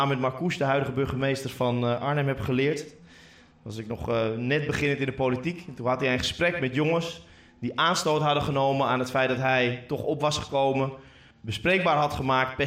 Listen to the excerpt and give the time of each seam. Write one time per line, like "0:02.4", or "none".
none

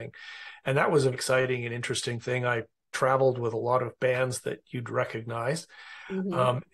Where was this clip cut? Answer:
0:01.1

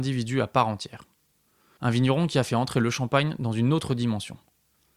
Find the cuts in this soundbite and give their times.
0:01.8

